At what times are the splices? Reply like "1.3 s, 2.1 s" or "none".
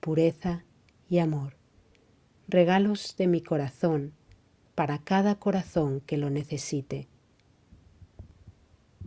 none